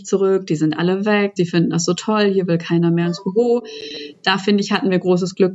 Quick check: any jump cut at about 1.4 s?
yes; 1 cut; at 1.4 s

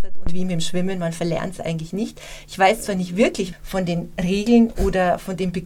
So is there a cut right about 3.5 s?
yes; 1 cut; at 3.5 s

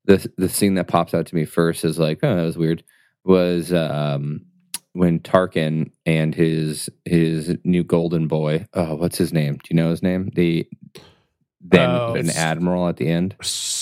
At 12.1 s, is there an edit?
yes; 1 cut; at 12.1 s

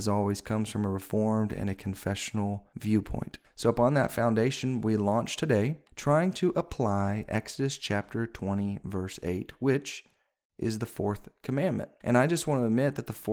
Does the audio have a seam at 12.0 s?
no; 0 cuts

